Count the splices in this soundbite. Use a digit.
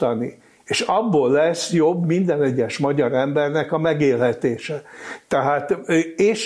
1